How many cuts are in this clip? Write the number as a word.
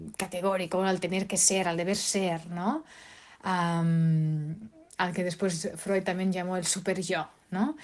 zero